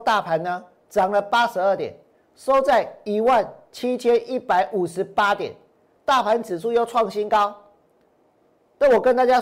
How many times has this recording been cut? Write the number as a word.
one